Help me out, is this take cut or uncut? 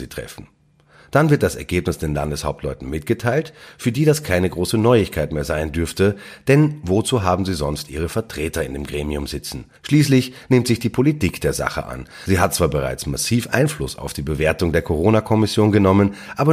uncut